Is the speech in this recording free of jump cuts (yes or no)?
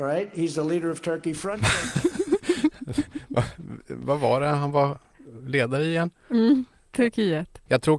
yes